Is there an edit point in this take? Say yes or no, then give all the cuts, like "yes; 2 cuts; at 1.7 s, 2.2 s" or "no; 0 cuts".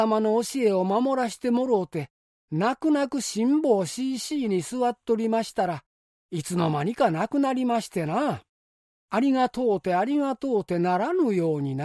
yes; 1 cut; at 6.1 s